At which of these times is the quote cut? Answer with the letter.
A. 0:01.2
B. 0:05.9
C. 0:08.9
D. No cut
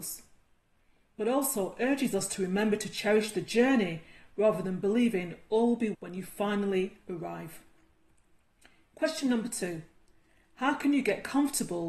B